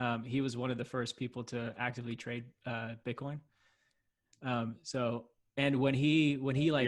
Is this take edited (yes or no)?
no